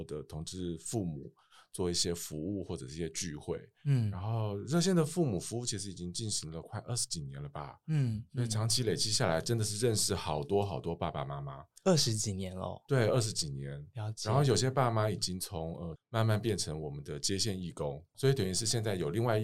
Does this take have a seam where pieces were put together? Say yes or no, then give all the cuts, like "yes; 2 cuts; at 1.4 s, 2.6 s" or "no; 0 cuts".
yes; 2 cuts; at 16.0 s, 18.1 s